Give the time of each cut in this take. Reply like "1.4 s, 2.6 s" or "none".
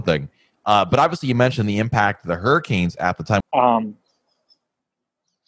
3.4 s